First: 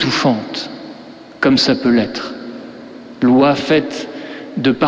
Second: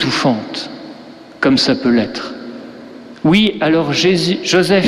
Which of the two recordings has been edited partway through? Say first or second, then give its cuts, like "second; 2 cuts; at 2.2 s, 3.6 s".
second; 1 cut; at 3.2 s